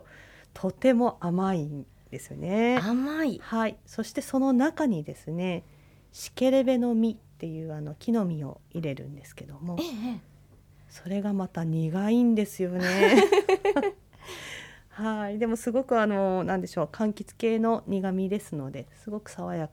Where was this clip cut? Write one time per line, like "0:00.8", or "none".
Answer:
none